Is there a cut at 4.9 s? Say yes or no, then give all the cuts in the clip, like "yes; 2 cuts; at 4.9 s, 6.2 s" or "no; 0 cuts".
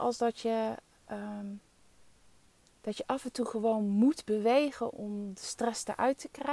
yes; 2 cuts; at 2.7 s, 4.9 s